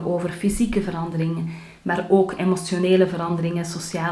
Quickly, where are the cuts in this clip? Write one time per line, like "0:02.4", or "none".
none

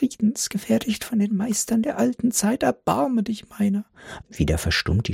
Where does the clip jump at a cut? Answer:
0:04.2

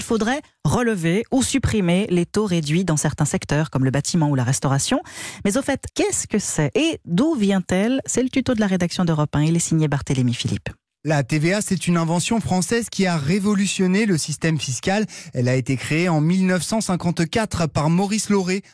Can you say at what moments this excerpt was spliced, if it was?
0:05.9

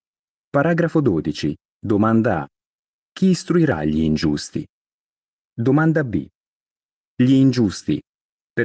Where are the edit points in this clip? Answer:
0:07.0

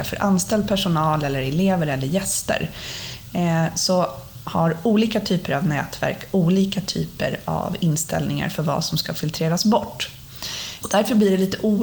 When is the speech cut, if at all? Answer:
0:10.8

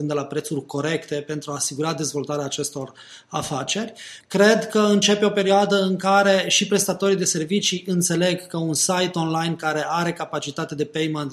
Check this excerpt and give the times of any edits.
0:04.2

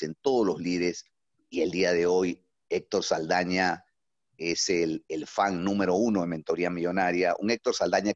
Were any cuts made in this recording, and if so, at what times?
0:01.3

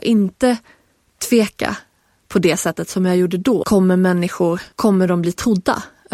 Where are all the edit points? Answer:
0:03.6
0:04.7

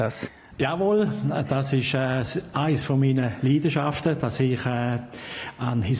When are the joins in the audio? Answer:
none

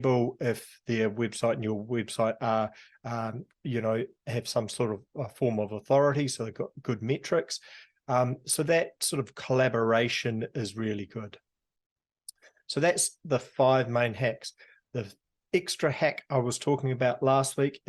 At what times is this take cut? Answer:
none

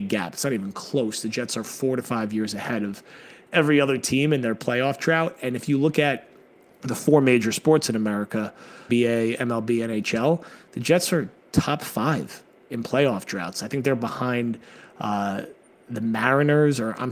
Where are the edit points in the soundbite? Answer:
0:08.9

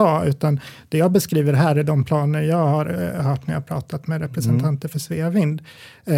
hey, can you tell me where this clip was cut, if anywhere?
none

